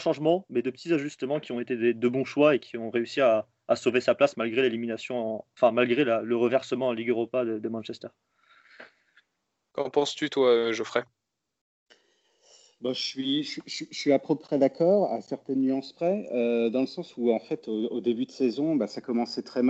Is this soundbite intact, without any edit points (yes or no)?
yes